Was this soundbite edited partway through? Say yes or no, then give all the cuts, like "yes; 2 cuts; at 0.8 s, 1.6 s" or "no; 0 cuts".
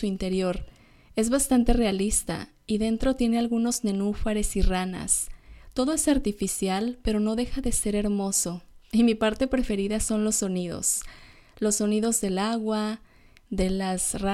no; 0 cuts